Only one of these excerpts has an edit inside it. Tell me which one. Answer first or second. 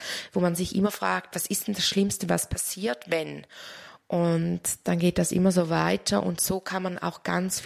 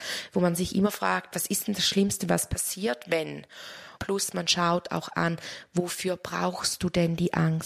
second